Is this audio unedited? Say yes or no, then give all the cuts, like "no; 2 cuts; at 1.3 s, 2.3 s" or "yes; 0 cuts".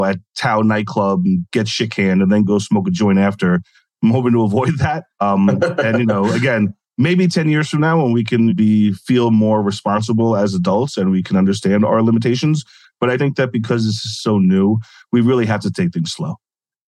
no; 2 cuts; at 8.5 s, 13.2 s